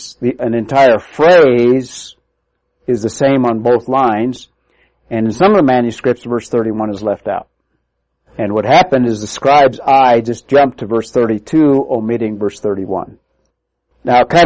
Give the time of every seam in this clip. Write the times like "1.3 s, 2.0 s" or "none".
none